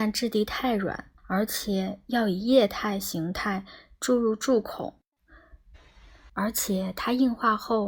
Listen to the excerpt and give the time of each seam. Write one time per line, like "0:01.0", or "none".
0:01.2
0:06.3